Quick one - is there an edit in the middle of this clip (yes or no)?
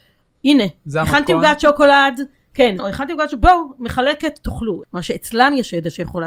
yes